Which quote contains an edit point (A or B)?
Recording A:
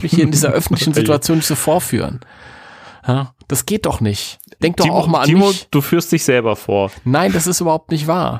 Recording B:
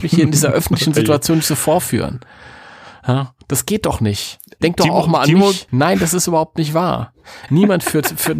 B